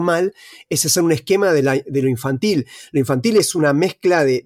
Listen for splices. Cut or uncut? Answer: uncut